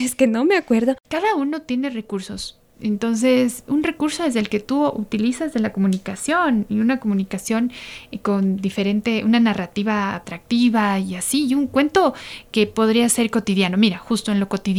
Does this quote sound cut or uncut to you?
uncut